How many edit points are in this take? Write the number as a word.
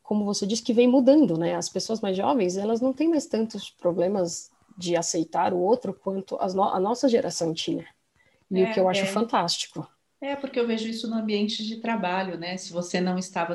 zero